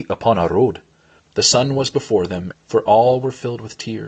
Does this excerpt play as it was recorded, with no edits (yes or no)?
no